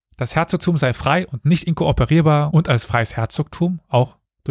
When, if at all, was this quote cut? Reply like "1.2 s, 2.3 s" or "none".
none